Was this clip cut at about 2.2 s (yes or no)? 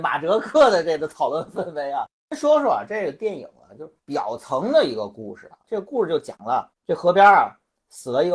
no